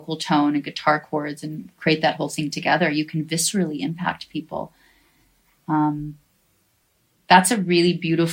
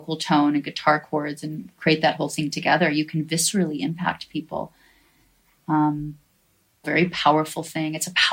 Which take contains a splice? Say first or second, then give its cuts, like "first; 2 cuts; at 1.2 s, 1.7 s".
second; 1 cut; at 6.8 s